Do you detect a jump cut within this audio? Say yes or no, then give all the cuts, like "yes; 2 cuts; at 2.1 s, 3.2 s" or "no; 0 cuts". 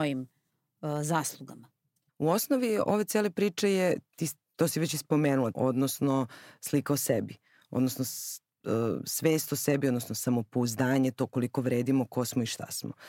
yes; 2 cuts; at 2.1 s, 5.5 s